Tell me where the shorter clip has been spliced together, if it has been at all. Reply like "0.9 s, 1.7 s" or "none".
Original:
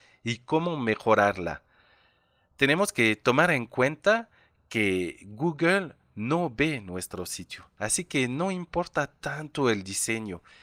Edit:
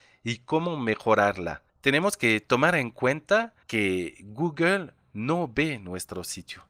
1.7 s, 3.6 s

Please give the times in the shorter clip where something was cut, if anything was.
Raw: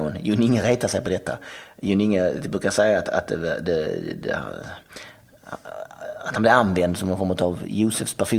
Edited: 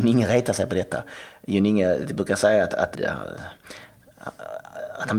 2.9 s

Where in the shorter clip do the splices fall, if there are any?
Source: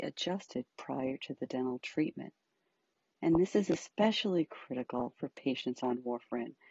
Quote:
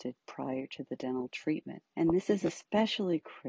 1.9 s

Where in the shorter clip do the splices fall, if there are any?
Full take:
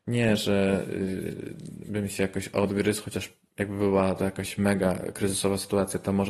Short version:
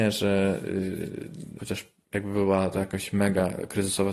1.6 s

